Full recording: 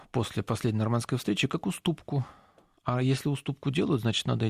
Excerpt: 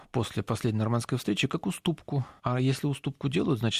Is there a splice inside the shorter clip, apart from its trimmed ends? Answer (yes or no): yes